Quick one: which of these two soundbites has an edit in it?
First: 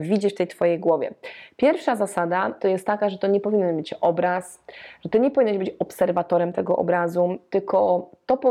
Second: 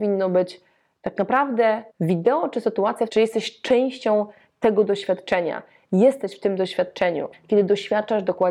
second; 3 cuts; at 1.9 s, 3.1 s, 7.3 s

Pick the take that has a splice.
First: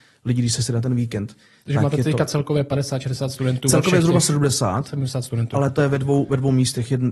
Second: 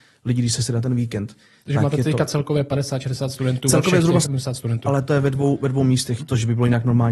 second; 2 cuts; at 4.2 s, 6.2 s

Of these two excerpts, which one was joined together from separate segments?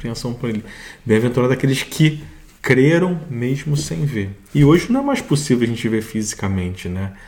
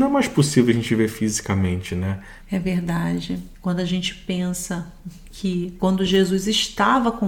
second; 3 cuts; at 2.4 s, 3.5 s, 5.8 s

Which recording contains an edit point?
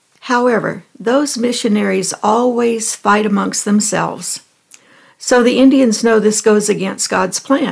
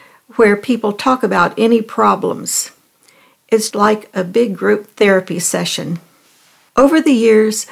second; 1 cut; at 3.7 s

